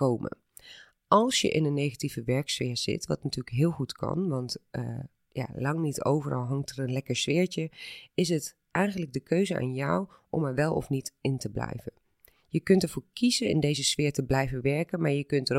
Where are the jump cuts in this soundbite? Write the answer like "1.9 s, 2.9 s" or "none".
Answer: none